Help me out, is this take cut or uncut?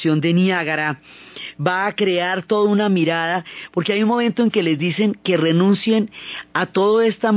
uncut